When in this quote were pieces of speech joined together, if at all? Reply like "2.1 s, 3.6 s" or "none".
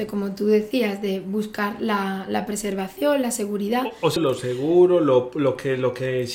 4.2 s